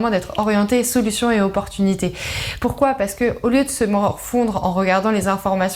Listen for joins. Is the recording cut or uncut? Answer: cut